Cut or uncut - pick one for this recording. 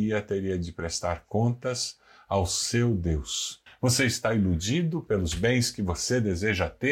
cut